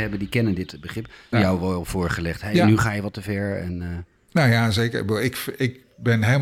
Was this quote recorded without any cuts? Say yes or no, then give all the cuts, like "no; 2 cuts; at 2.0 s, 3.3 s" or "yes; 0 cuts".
no; 1 cut; at 1.3 s